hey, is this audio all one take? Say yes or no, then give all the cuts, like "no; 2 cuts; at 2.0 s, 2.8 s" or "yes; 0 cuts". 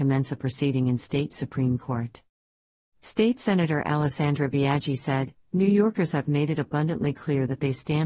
no; 1 cut; at 5.4 s